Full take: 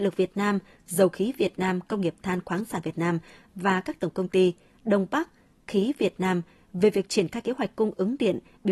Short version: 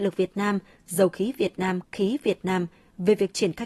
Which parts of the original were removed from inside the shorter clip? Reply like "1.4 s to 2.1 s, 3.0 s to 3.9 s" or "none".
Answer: 1.8 s to 5.6 s